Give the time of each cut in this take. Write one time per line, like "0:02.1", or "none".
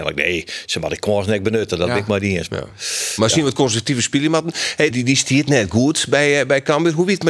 0:04.9